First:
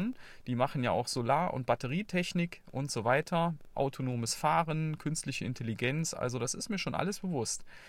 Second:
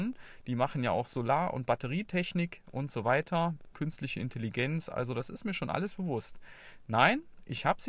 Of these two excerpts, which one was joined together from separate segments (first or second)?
second